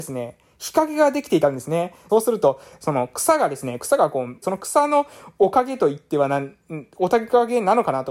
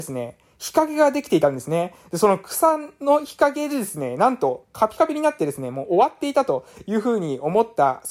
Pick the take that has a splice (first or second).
first